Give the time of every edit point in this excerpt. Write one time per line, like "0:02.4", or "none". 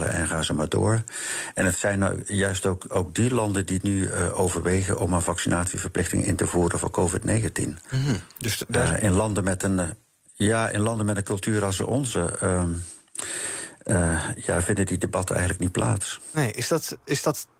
none